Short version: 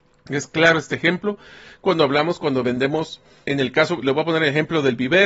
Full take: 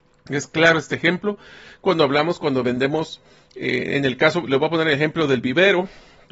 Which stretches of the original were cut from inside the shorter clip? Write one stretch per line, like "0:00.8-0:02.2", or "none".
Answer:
0:03.5-0:03.9